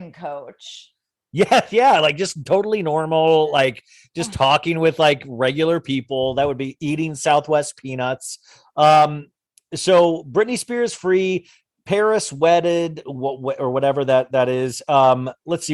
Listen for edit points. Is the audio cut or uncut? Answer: uncut